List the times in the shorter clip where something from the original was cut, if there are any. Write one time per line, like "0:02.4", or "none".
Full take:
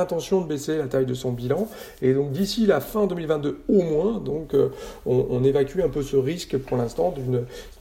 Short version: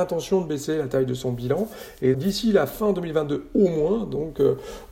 0:02.1